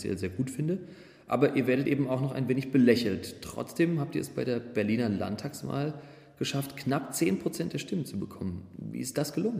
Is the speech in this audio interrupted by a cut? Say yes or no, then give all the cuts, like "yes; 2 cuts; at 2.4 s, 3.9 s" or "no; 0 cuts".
no; 0 cuts